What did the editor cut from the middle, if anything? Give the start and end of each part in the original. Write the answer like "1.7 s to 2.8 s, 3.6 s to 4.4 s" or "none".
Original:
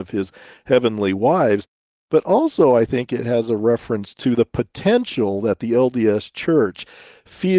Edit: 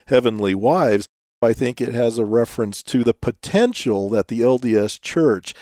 2.0 s to 2.7 s